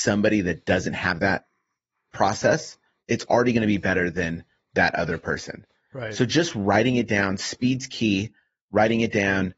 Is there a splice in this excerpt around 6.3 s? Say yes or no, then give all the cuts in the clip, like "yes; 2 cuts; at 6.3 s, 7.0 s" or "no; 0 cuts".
no; 0 cuts